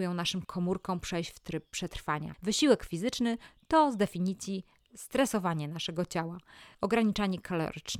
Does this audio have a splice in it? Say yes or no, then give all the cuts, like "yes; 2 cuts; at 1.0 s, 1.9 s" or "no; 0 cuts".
yes; 1 cut; at 6.7 s